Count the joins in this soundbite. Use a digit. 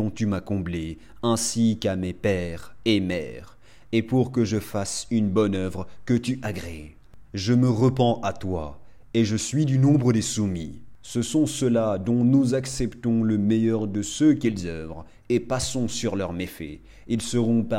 1